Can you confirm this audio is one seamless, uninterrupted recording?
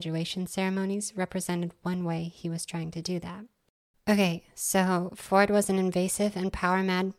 yes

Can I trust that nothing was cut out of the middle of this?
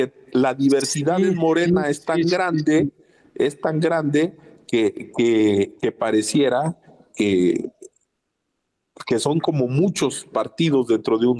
yes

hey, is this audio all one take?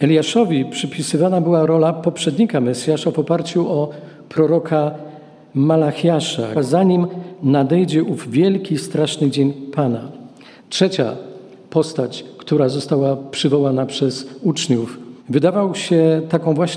no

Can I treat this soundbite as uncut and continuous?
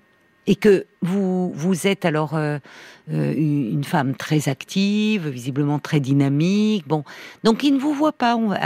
no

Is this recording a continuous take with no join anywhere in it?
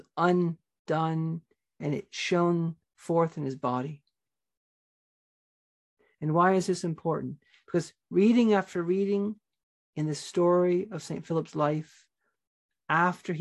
yes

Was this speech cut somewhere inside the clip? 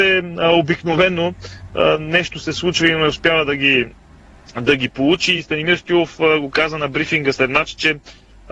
no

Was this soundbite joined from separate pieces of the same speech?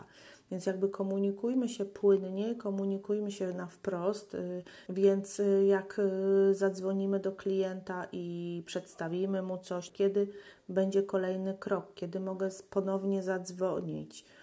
yes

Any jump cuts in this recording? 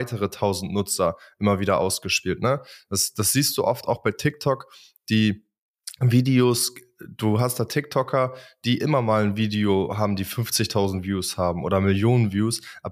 no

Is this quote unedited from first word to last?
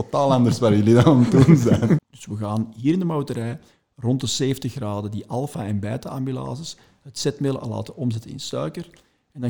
no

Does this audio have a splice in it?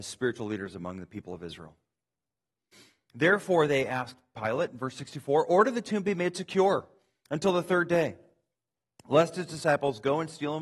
no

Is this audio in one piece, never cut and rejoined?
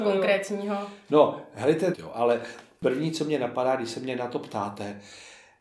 no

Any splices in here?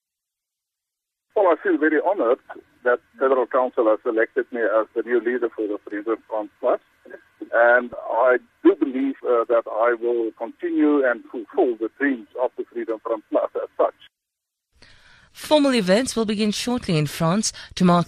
yes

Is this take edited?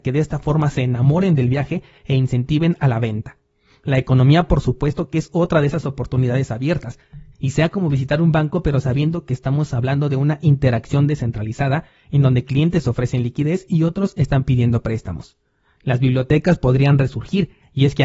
yes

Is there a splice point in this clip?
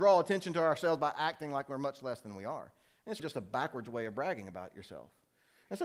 yes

